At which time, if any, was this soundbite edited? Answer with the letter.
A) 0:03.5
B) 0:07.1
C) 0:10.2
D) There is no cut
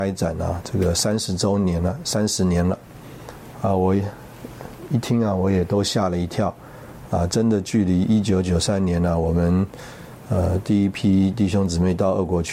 D